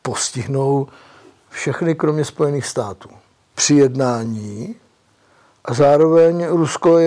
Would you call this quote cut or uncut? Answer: cut